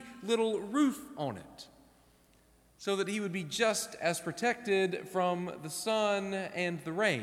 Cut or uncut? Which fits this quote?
uncut